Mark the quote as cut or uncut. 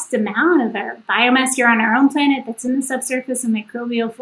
uncut